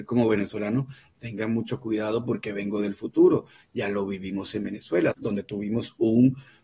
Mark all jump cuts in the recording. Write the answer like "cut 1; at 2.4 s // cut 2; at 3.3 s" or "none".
cut 1; at 5.1 s

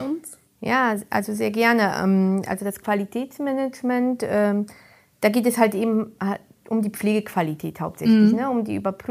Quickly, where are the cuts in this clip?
none

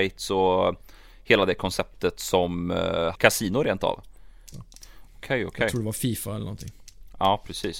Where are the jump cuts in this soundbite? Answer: cut 1; at 3.2 s // cut 2; at 4.5 s

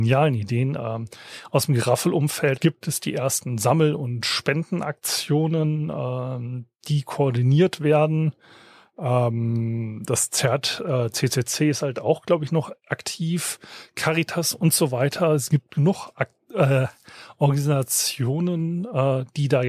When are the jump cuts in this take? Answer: cut 1; at 2.6 s

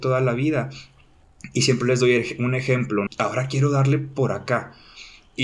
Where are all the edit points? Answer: cut 1; at 3.1 s

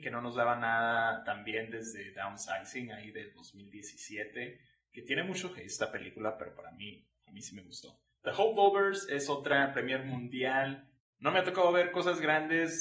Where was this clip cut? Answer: cut 1; at 8.2 s // cut 2; at 11.0 s

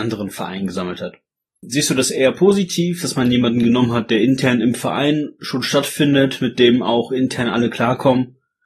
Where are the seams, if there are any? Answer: cut 1; at 1.6 s

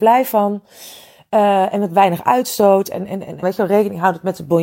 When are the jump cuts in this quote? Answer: cut 1; at 3.4 s

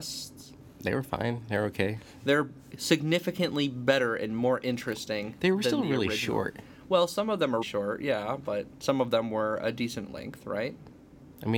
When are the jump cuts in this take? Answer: cut 1; at 7.6 s

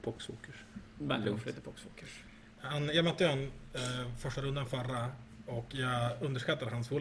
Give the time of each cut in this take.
none

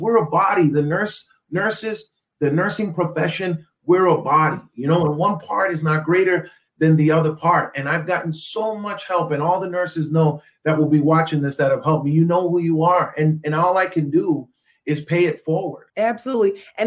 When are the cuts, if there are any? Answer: cut 1; at 15.9 s

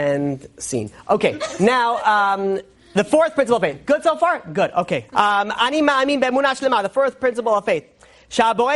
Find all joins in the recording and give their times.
cut 1; at 5.1 s

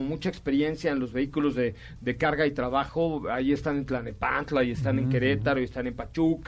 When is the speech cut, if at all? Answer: none

